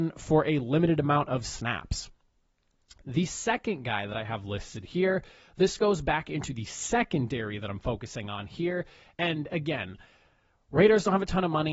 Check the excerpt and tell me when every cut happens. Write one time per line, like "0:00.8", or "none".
none